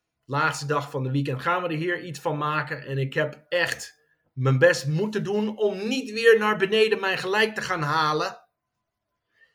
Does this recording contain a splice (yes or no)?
no